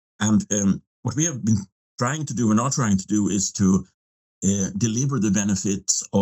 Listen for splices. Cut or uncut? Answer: uncut